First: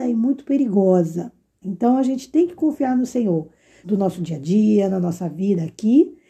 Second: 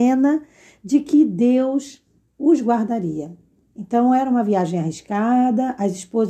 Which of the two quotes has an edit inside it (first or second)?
first